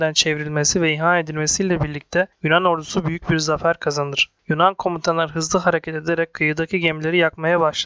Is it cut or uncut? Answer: uncut